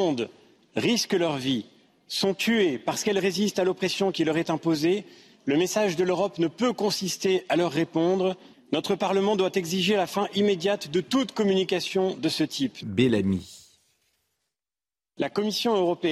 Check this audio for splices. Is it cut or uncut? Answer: cut